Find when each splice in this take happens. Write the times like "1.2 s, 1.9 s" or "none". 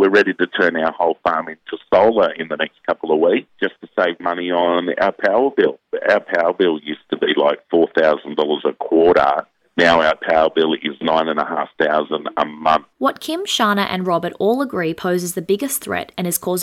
12.9 s